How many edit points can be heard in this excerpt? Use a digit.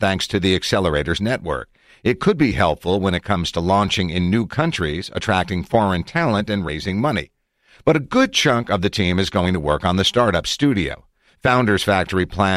0